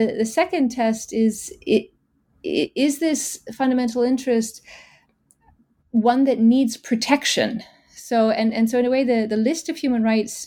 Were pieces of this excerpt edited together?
no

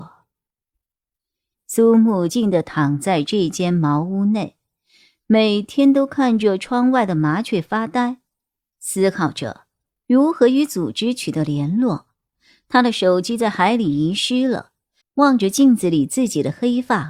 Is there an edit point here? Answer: yes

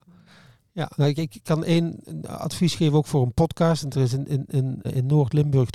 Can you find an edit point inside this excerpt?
yes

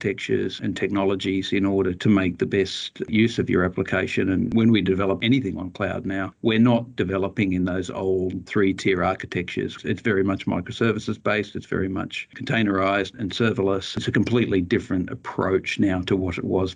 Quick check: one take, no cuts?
yes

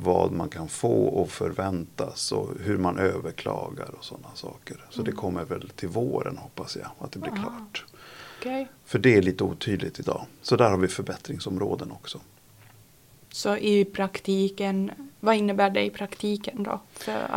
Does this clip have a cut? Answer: no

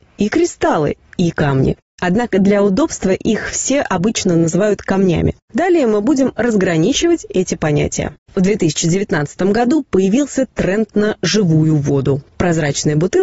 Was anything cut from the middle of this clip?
yes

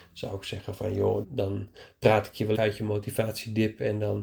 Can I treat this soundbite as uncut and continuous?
no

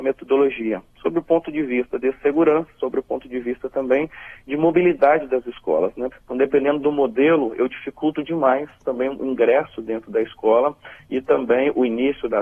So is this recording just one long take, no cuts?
no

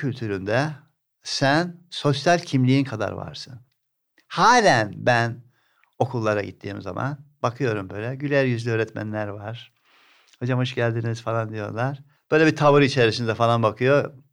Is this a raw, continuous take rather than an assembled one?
no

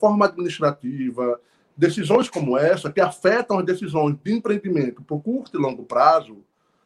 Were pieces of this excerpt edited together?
no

